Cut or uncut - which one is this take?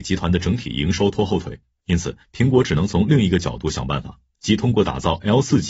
uncut